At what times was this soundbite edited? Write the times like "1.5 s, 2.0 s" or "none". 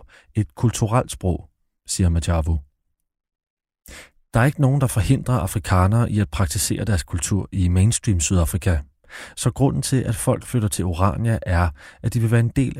4.2 s